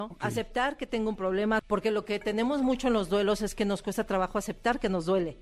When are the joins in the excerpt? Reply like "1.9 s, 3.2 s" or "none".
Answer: 1.6 s